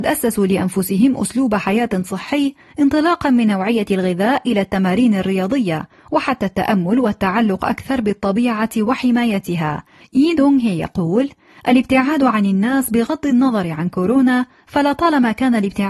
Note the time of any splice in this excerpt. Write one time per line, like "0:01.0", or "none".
0:10.0